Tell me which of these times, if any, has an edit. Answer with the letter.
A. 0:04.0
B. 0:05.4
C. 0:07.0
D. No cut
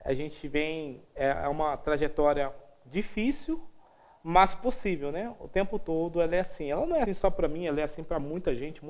C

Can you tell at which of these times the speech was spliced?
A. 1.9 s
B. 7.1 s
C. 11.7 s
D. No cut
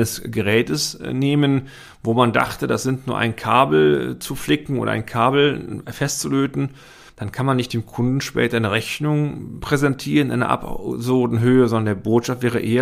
B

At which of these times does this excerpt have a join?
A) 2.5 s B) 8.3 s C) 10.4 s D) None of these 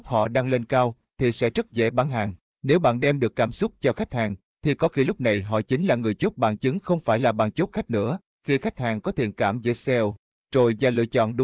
B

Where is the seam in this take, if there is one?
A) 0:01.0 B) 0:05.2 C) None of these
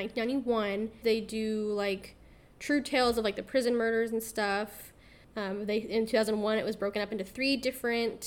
A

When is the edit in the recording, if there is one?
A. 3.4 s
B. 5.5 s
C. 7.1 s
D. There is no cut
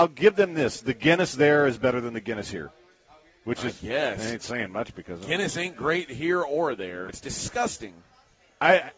C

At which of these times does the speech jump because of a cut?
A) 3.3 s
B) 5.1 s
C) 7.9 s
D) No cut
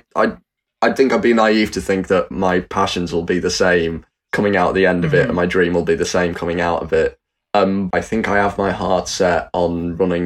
C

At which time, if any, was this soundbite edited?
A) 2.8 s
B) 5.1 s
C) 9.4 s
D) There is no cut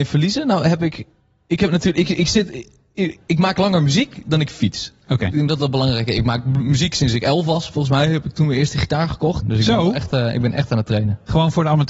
C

